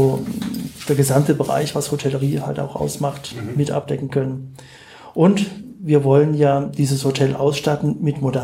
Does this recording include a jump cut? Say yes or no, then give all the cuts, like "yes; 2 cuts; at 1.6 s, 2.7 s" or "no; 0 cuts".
no; 0 cuts